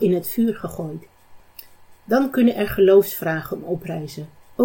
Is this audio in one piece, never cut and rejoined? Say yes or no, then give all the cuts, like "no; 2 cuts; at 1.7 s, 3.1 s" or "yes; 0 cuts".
yes; 0 cuts